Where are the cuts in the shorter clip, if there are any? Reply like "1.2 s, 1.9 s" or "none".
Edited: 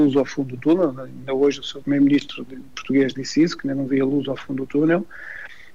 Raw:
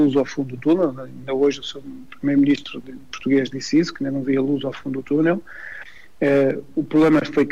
1.8 s